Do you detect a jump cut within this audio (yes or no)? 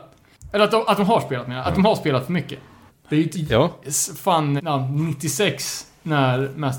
yes